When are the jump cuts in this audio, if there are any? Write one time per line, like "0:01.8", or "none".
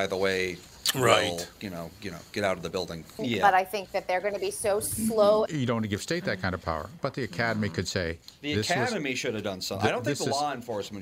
0:03.2
0:05.5